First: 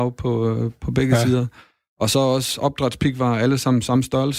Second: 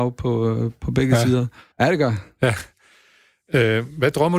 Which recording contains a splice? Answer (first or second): second